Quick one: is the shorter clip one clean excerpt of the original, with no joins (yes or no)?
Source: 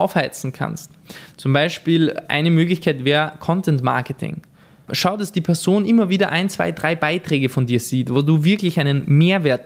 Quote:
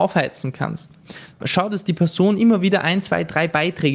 no